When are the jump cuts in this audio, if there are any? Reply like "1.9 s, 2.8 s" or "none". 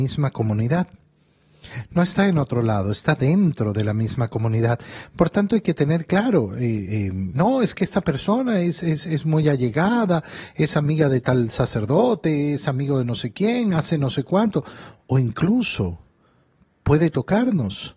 7.3 s